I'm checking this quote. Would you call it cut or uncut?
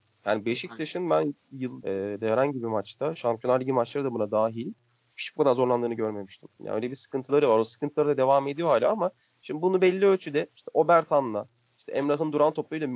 cut